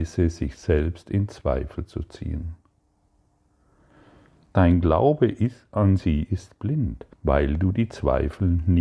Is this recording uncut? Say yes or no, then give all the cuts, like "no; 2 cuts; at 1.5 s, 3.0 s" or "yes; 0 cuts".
no; 2 cuts; at 4.5 s, 7.1 s